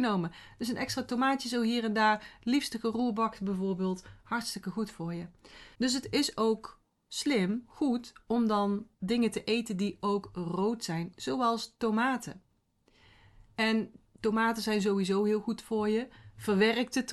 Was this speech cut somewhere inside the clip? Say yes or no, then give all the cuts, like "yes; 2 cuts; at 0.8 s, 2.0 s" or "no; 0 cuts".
yes; 1 cut; at 5.7 s